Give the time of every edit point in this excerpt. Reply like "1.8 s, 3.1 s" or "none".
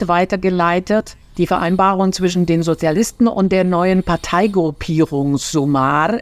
1.3 s